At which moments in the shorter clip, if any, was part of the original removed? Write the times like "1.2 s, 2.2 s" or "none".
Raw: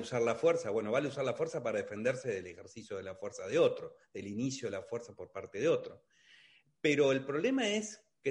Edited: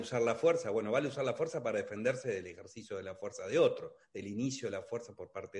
none